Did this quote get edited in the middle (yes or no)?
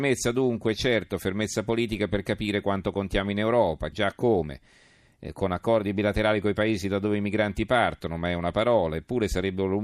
yes